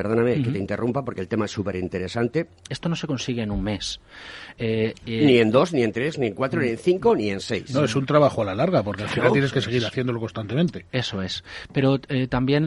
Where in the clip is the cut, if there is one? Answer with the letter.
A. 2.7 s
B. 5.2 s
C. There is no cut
A